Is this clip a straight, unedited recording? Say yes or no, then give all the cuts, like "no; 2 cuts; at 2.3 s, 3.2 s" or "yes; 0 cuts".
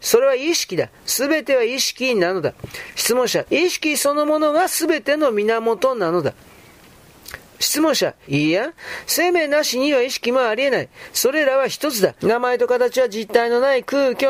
no; 3 cuts; at 3.4 s, 8.2 s, 12.2 s